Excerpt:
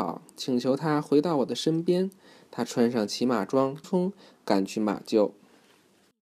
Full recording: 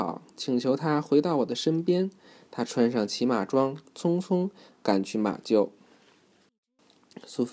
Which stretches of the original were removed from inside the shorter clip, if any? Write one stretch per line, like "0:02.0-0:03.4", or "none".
0:03.8-0:04.2